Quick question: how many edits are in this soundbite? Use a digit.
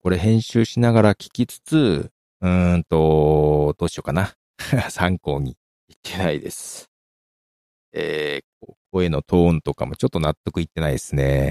1